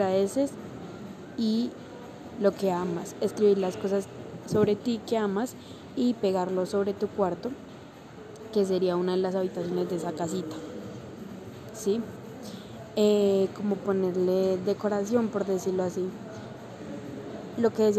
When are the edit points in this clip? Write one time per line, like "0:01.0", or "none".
0:04.4